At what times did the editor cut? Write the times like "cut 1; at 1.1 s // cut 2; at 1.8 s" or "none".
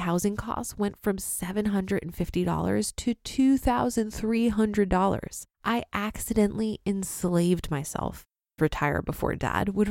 cut 1; at 5.5 s // cut 2; at 8.6 s